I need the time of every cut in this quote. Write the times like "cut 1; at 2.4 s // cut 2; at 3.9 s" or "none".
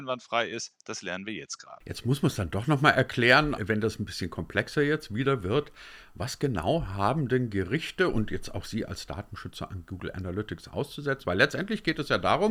cut 1; at 3.6 s // cut 2; at 11.2 s

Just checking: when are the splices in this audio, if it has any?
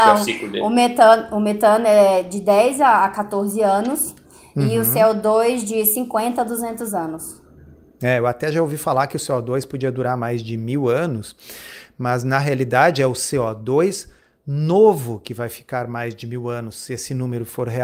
none

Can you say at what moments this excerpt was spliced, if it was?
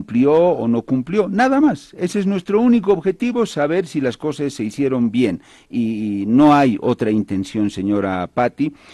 none

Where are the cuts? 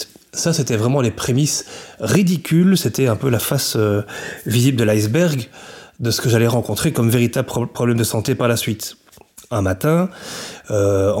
none

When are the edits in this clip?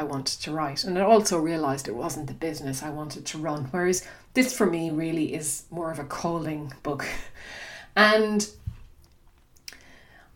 none

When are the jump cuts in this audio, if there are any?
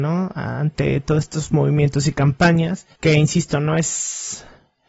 cut 1; at 2.9 s

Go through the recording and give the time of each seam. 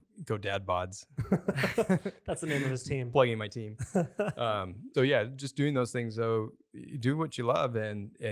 cut 1; at 4.9 s

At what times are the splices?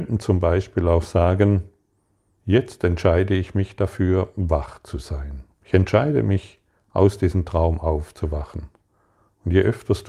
cut 1; at 2.3 s // cut 2; at 5.5 s

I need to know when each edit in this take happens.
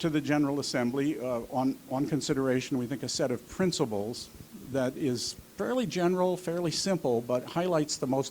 none

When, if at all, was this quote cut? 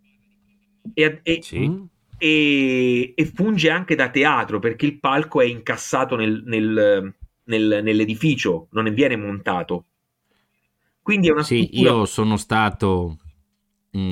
none

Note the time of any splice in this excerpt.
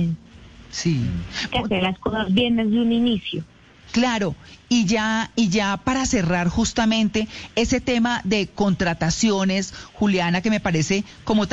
cut 1; at 1.5 s

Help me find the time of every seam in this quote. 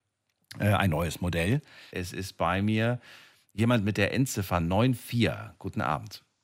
cut 1; at 1.9 s

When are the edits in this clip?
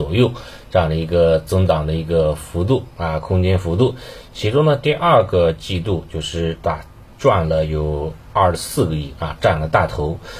none

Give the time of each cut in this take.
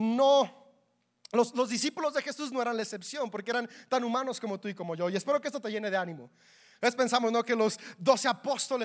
none

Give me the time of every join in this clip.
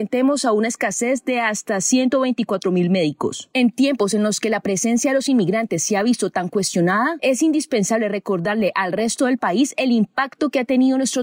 none

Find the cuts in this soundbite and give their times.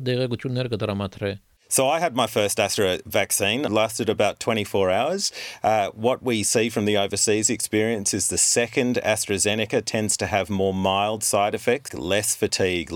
cut 1; at 3.7 s // cut 2; at 11.9 s

